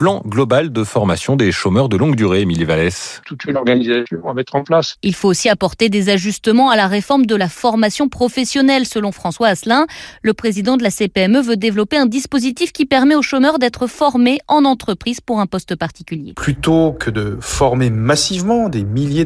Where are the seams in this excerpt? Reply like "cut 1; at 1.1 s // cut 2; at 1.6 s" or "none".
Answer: cut 1; at 3.2 s